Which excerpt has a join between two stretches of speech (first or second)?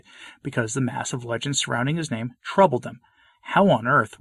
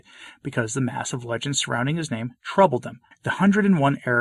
second